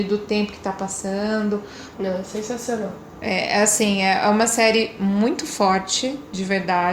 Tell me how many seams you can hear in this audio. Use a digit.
1